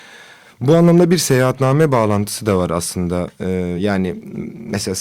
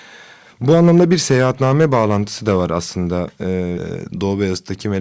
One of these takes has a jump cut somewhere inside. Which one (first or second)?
second